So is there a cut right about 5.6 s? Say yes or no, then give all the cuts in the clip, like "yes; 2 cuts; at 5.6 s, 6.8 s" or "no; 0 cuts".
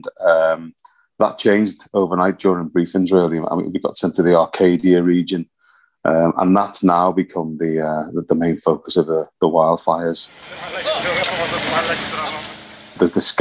no; 0 cuts